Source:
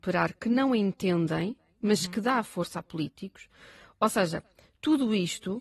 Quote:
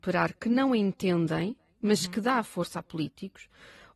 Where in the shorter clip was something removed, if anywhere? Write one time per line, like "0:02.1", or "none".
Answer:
none